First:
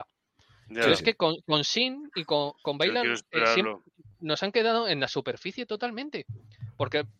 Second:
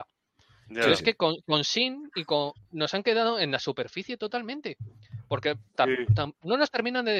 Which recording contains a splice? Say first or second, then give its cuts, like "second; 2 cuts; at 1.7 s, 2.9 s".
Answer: second; 1 cut; at 2.5 s